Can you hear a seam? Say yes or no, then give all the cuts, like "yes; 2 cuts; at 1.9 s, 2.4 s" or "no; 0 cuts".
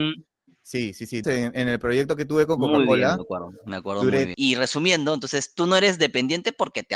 yes; 2 cuts; at 1.2 s, 4.3 s